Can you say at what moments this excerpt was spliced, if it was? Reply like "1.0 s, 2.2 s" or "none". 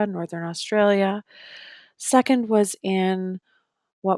none